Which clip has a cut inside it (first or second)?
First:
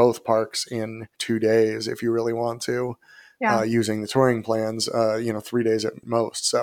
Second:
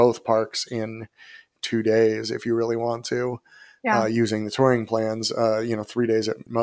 first